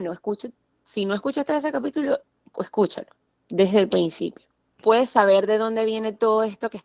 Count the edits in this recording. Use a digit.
1